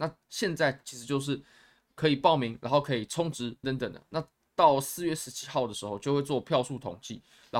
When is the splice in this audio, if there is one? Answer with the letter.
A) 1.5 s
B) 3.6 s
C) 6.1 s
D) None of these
B